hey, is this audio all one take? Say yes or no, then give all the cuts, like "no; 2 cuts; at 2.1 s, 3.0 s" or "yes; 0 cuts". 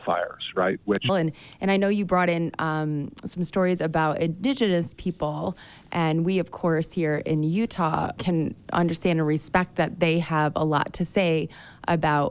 no; 2 cuts; at 1.1 s, 8.2 s